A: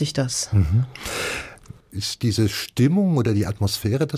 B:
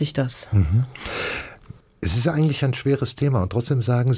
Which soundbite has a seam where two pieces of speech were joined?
A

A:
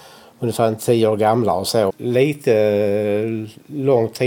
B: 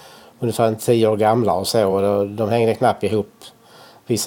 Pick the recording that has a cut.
A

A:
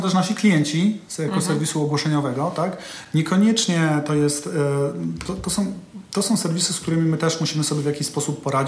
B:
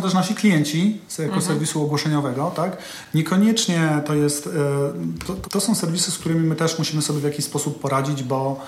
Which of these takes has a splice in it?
B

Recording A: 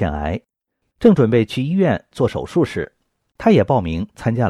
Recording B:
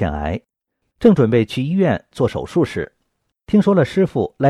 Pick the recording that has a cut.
A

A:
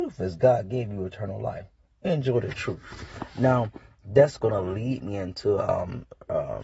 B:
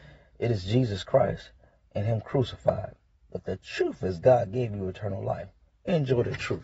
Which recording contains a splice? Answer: B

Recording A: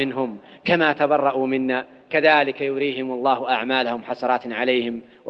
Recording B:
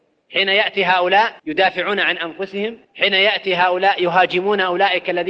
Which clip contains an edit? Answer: B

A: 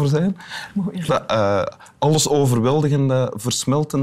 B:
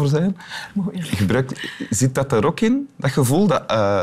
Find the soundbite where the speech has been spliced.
A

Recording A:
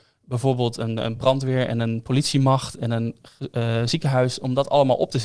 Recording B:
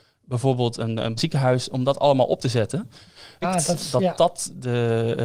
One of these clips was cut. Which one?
B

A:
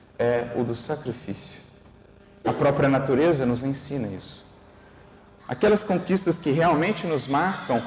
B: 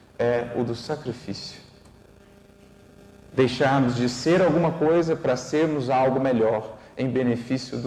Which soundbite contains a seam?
A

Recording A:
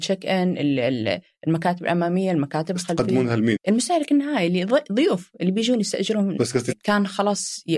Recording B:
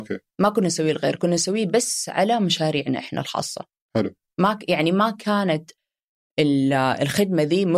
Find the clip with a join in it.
A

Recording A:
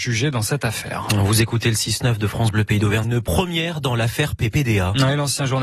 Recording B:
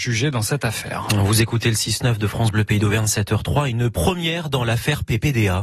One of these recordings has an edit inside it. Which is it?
A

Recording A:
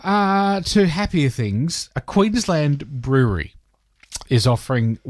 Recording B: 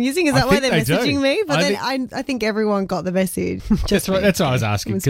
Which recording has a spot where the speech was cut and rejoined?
B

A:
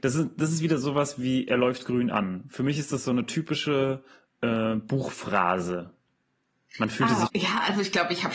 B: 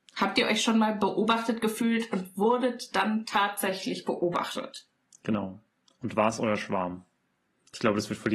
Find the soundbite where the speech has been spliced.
A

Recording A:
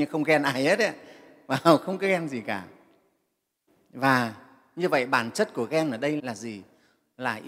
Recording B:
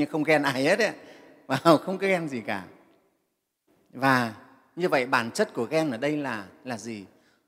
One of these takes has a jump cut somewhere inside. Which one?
A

